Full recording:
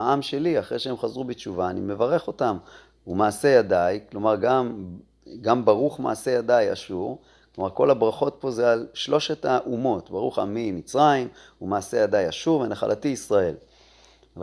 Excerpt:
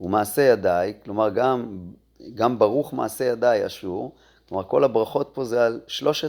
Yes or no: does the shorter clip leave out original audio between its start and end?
no